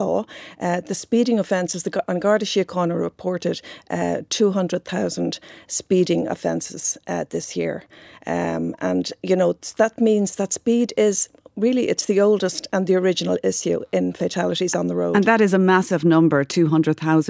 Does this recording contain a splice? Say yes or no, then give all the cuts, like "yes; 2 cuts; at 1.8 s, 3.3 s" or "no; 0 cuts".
no; 0 cuts